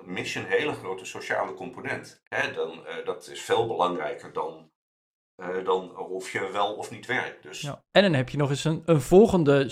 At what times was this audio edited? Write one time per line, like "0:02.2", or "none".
0:02.2
0:07.8